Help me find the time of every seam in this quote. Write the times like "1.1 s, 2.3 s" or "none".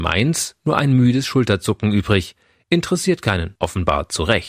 3.5 s